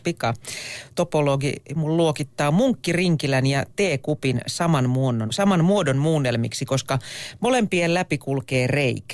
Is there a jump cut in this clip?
yes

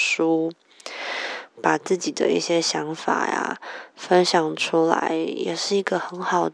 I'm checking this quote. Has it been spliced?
yes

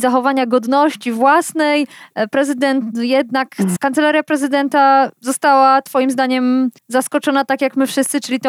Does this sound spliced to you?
yes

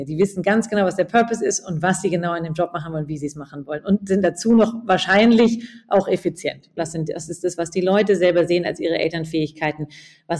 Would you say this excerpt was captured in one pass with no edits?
no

